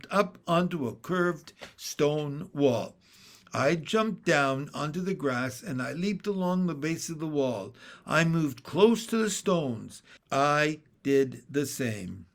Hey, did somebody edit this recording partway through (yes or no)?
yes